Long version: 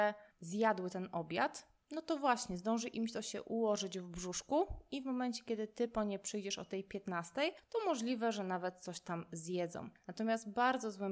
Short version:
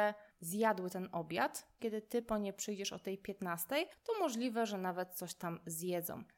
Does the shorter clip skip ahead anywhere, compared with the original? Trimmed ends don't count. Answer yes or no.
yes